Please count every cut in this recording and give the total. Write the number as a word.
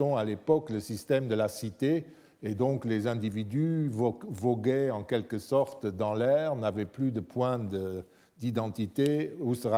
zero